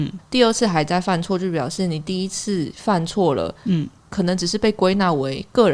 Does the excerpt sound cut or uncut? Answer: cut